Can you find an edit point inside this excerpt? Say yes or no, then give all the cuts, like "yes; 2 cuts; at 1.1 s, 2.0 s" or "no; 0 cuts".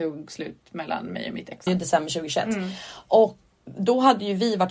yes; 2 cuts; at 1.7 s, 3.5 s